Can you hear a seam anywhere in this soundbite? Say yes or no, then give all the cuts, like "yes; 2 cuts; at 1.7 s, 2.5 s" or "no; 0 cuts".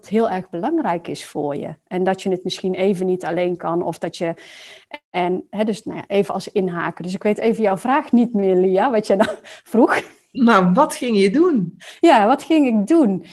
no; 0 cuts